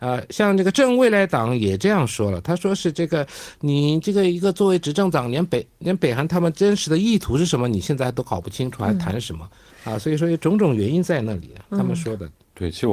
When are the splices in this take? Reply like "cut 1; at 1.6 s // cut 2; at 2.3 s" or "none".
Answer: cut 1; at 9.7 s